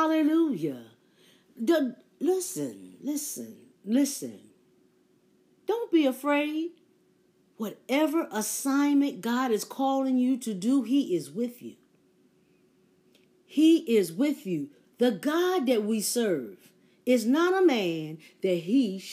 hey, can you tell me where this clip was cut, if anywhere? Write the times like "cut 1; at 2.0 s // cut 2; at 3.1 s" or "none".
cut 1; at 7.5 s